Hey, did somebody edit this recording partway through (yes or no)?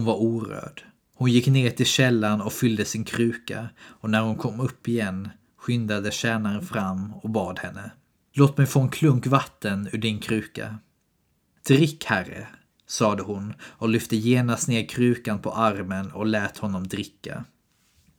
yes